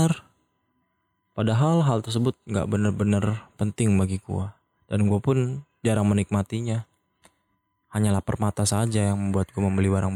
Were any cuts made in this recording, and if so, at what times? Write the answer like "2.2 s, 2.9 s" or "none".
none